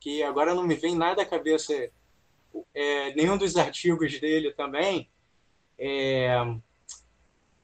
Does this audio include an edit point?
yes; 1 cut; at 2.6 s

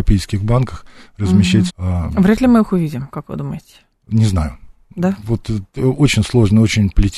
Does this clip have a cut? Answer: yes; 1 cut; at 1.7 s

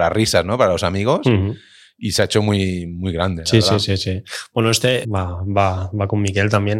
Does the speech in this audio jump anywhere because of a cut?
yes; 1 cut; at 5.0 s

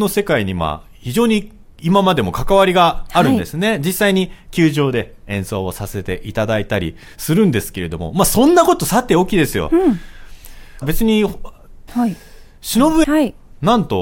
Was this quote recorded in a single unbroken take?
no; 3 cuts; at 10.8 s, 11.9 s, 13.0 s

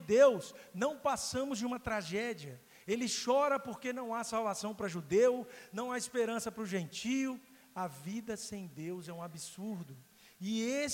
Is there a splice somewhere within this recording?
no; 0 cuts

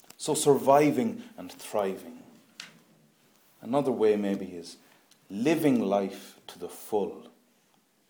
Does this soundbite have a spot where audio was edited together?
no; 0 cuts

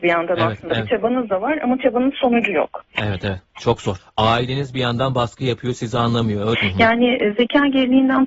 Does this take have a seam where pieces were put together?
yes; 2 cuts; at 4.0 s, 6.5 s

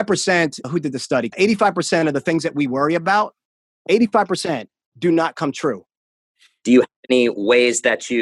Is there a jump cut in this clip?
yes; 2 cuts; at 1.3 s, 6.6 s

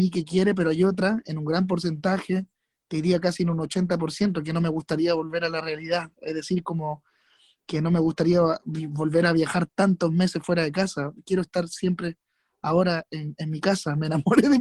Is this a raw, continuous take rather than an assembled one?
yes; 0 cuts

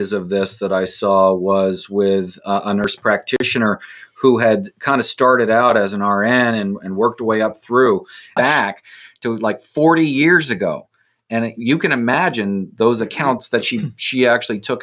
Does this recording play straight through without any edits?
no; 1 cut; at 8.4 s

